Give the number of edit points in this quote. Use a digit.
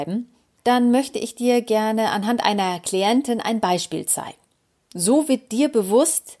0